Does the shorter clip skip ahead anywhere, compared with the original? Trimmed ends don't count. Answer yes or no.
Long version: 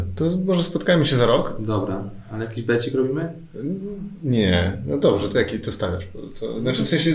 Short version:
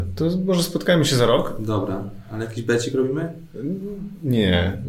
no